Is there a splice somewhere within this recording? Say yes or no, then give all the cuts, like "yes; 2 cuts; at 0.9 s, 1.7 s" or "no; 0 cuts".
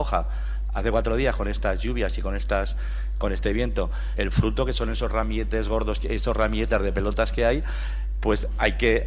yes; 1 cut; at 4.2 s